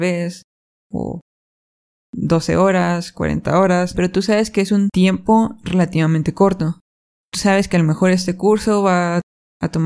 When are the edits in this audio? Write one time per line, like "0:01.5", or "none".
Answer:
0:03.9
0:07.2